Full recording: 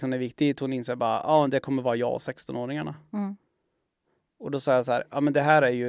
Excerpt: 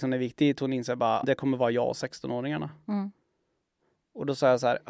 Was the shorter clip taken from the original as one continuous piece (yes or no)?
no